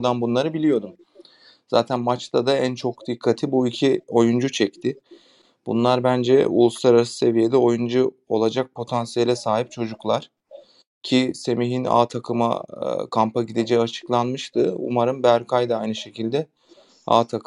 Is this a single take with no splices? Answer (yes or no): yes